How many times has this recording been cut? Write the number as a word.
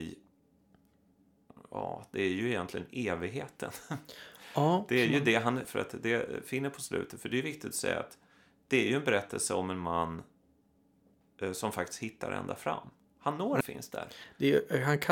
two